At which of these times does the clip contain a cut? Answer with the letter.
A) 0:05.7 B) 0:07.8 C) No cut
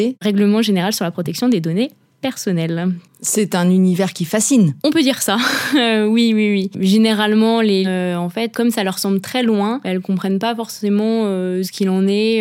B